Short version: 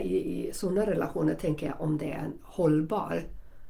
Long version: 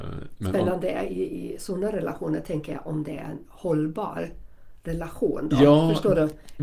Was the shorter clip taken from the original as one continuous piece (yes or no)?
yes